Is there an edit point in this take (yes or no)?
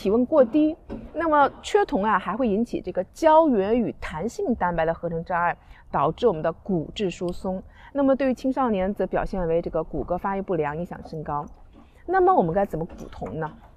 no